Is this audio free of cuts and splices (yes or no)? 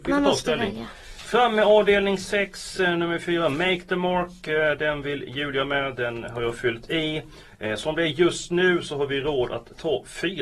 yes